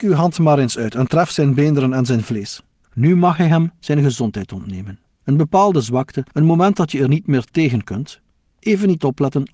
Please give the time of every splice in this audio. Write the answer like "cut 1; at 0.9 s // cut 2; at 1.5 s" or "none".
cut 1; at 2.8 s // cut 2; at 5.2 s

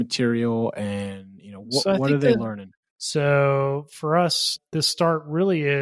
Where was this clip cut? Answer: cut 1; at 2.9 s

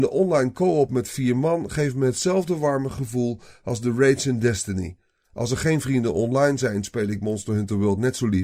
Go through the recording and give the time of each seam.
none

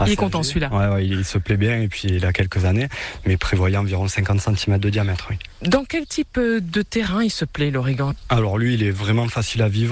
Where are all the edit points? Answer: none

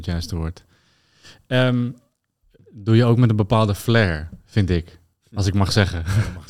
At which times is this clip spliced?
cut 1; at 2.6 s

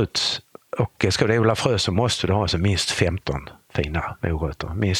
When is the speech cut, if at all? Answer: none

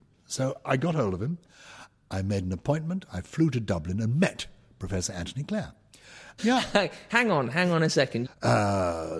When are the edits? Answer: cut 1; at 6.4 s // cut 2; at 8.3 s

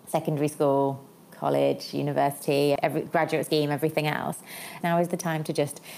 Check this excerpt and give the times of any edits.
cut 1; at 2.8 s // cut 2; at 4.8 s

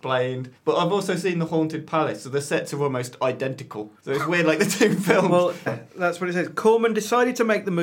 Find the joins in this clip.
cut 1; at 5.7 s

